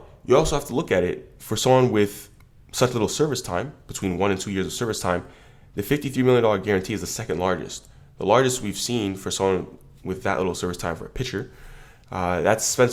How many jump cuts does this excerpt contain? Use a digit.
0